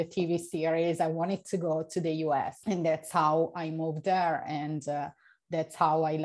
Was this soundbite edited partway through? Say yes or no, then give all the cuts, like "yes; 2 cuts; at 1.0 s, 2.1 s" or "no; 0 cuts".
yes; 1 cut; at 2.6 s